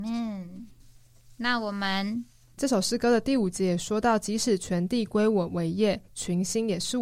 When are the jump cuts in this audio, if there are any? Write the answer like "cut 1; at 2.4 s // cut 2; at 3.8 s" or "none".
cut 1; at 2.6 s